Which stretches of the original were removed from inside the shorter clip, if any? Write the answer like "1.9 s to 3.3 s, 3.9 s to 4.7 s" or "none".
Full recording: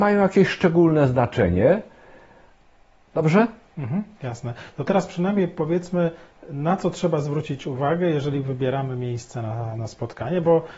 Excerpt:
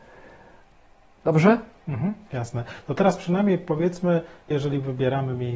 6.4 s to 8.1 s